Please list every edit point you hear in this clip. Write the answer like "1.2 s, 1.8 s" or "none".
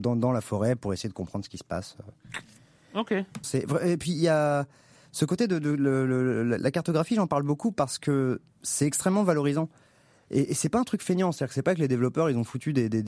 3.4 s